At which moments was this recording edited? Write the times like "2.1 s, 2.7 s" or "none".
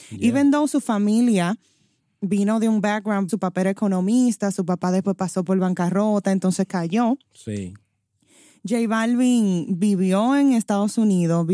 3.3 s